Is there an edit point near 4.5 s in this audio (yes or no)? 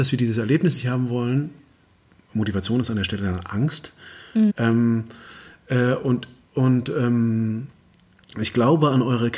yes